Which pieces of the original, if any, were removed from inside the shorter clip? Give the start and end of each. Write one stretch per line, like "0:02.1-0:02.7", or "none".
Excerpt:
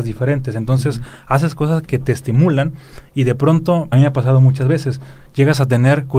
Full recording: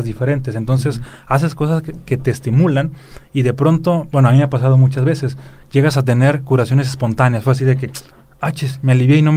0:01.8-0:02.0
0:04.1-0:04.3